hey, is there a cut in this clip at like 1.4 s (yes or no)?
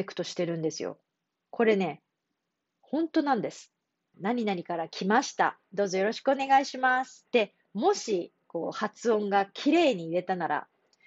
no